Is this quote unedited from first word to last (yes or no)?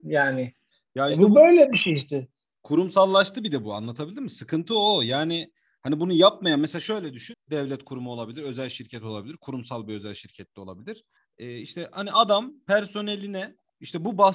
no